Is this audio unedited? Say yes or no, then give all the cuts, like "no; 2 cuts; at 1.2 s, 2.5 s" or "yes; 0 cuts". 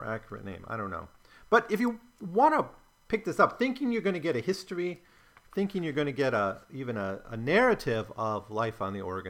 yes; 0 cuts